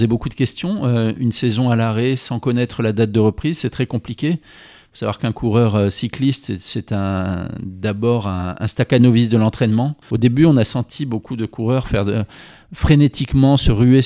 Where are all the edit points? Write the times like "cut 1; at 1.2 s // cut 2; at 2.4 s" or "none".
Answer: cut 1; at 10.0 s